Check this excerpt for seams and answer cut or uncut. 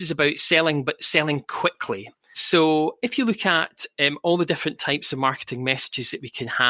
cut